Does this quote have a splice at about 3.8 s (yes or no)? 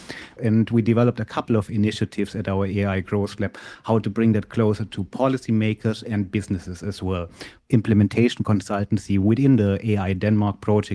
no